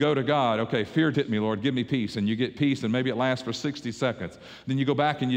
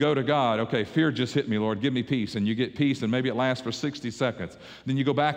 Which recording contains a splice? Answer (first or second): first